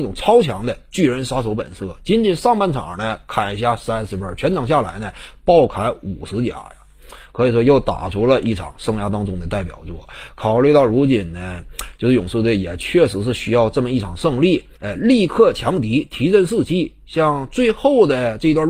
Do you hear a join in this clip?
yes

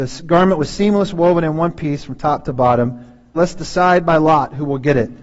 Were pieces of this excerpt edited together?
yes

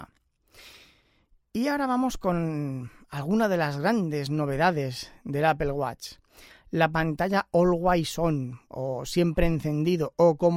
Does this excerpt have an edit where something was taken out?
no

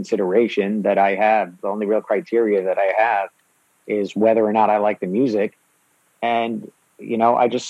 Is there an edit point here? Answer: no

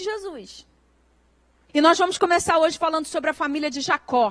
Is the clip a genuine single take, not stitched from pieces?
no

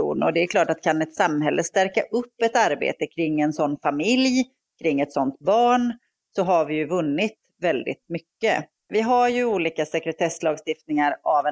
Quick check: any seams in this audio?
no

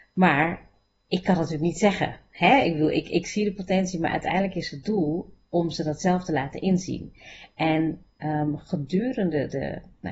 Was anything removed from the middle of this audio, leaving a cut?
no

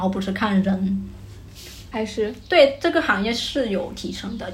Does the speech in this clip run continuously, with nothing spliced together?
no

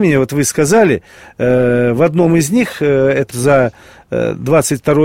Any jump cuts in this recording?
yes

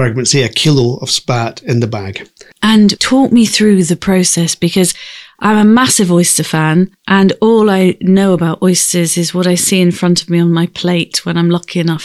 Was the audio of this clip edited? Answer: yes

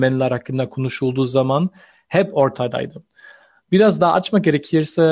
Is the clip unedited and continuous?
yes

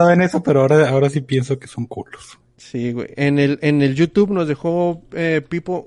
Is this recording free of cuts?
yes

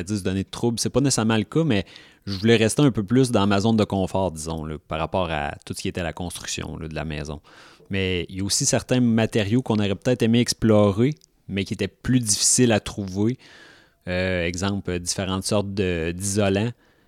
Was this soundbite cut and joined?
no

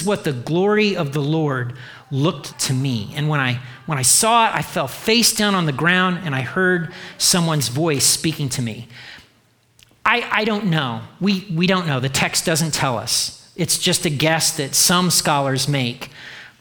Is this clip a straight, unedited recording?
no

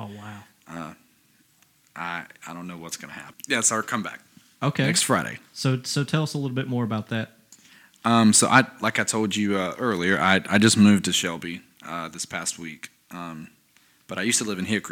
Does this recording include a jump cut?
yes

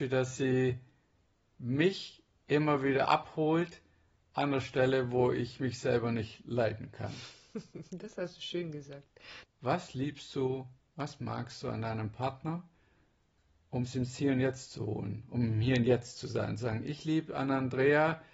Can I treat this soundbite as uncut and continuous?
no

